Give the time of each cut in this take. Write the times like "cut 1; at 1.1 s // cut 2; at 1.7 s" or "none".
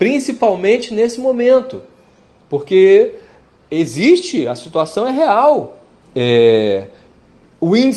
cut 1; at 6.0 s